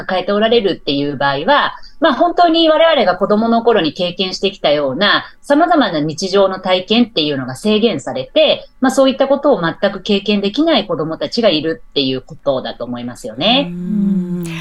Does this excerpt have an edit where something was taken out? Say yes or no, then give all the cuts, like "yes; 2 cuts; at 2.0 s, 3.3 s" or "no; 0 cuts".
no; 0 cuts